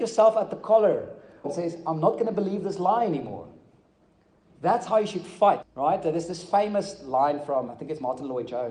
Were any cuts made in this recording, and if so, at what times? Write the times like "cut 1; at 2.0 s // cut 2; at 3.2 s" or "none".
cut 1; at 1.4 s // cut 2; at 5.6 s // cut 3; at 7.7 s

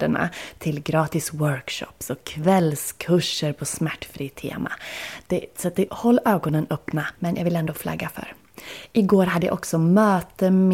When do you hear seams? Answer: cut 1; at 5.9 s // cut 2; at 7.2 s

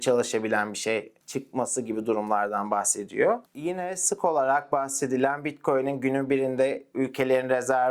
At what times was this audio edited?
none

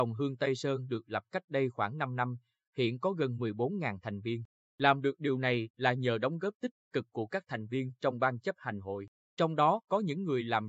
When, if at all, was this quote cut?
cut 1; at 4.6 s

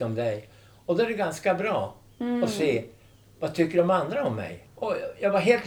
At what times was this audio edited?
cut 1; at 4.6 s

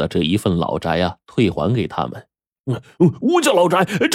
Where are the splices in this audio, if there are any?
cut 1; at 2.6 s

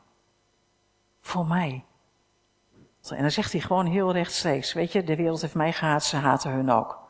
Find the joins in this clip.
cut 1; at 3.0 s

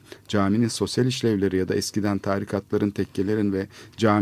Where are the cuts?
none

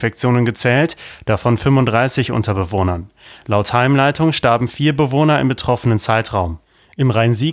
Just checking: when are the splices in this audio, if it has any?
none

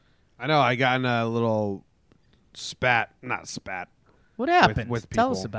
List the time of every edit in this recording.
none

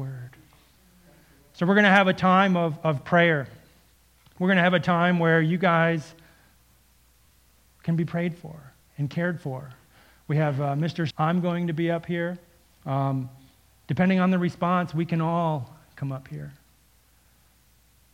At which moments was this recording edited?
cut 1; at 11.1 s

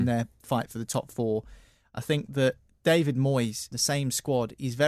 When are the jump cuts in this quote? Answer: cut 1; at 3.7 s

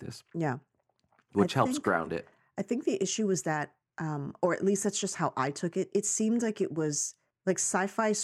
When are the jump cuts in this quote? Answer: none

